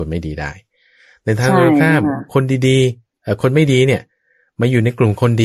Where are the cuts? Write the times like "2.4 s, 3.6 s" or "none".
none